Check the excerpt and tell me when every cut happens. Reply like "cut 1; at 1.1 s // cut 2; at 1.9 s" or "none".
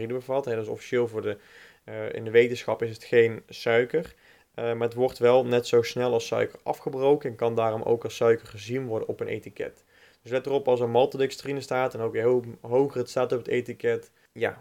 none